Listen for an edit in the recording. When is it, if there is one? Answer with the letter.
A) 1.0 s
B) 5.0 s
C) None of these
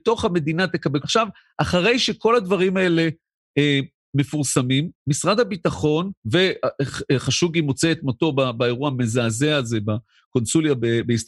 A